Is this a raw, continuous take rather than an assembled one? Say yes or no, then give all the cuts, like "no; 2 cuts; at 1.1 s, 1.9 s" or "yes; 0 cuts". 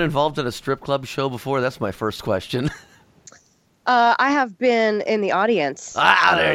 yes; 0 cuts